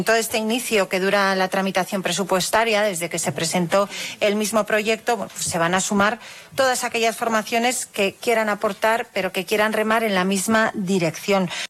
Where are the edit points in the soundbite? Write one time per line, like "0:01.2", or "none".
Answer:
none